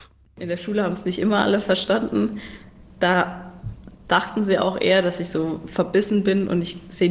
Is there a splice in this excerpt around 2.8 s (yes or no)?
no